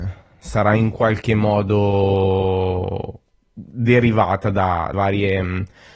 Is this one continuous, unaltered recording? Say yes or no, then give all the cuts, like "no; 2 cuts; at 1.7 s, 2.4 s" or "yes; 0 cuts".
no; 1 cut; at 4.9 s